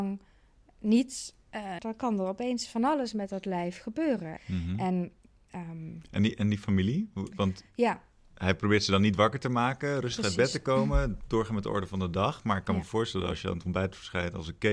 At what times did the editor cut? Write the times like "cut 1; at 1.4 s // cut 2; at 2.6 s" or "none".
cut 1; at 1.8 s // cut 2; at 4.4 s

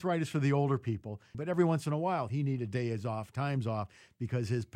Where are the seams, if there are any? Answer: cut 1; at 1.3 s

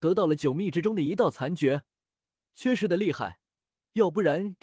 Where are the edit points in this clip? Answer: cut 1; at 2.4 s

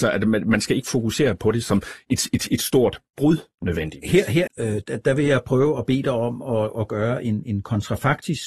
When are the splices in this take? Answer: cut 1; at 4.5 s

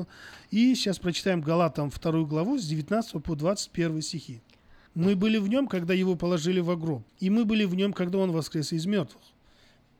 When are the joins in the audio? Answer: cut 1; at 4.9 s // cut 2; at 7.1 s

